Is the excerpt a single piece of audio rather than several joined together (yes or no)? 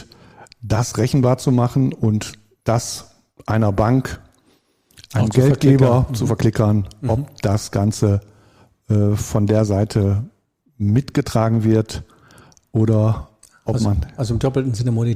yes